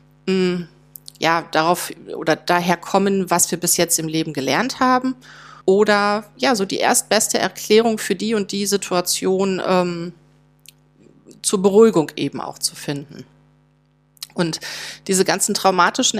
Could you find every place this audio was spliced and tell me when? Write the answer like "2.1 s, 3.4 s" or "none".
5.6 s